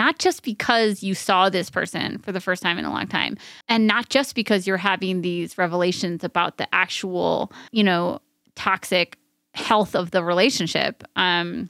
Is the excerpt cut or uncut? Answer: cut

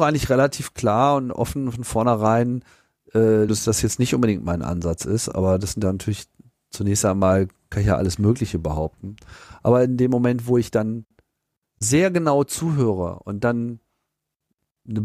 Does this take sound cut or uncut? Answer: cut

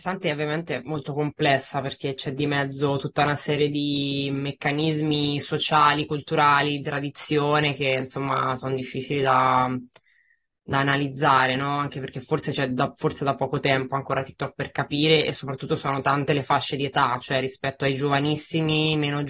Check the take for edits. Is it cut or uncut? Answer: uncut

